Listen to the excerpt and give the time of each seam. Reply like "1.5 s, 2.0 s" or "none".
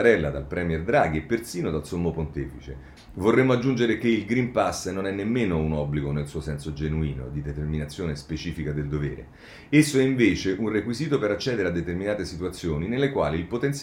3.0 s